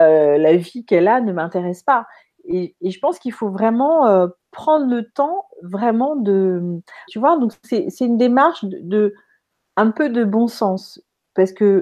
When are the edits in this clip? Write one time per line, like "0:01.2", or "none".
0:07.1